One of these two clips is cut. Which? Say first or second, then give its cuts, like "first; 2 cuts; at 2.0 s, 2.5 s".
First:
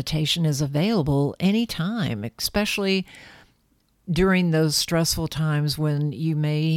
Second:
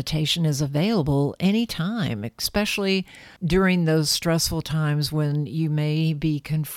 second; 1 cut; at 3.4 s